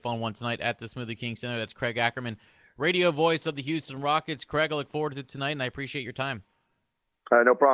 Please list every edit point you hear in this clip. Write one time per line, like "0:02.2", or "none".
none